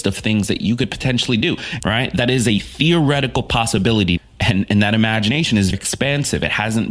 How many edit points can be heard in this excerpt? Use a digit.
3